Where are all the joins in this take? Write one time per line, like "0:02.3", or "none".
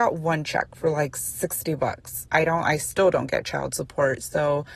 0:02.3